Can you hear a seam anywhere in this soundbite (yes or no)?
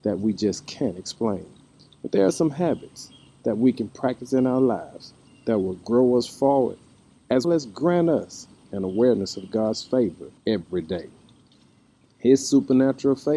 yes